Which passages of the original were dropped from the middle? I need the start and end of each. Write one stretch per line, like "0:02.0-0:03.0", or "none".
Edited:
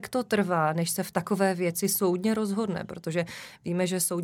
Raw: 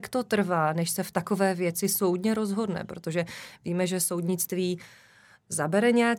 none